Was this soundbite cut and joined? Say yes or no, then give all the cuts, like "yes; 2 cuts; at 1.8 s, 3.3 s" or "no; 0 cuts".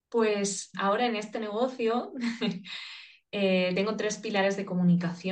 no; 0 cuts